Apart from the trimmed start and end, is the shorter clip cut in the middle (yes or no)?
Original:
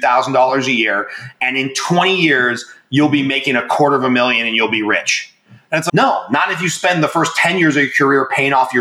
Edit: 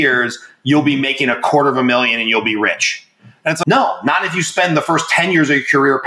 no